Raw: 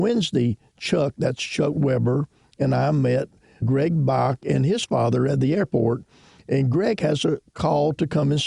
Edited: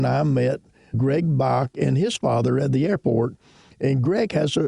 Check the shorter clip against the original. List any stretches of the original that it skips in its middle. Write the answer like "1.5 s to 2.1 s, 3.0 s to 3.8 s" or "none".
none